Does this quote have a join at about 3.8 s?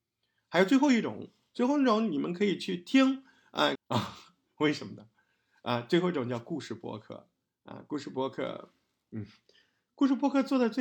yes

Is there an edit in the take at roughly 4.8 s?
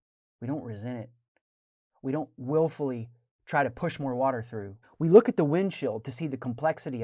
yes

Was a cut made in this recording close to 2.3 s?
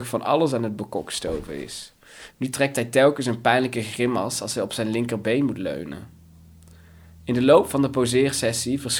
yes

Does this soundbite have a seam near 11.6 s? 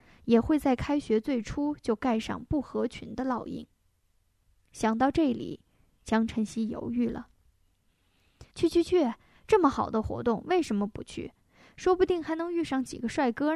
no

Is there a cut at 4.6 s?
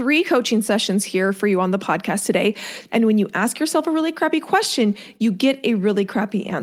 no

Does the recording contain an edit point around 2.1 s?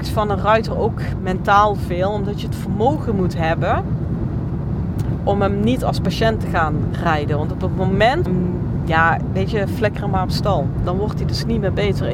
no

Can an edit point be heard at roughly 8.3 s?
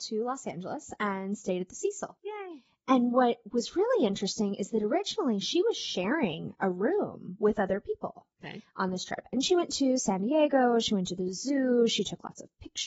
yes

